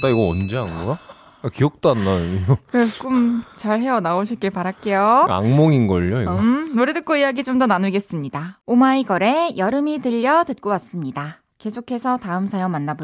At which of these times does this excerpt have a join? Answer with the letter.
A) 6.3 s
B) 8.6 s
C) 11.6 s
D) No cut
B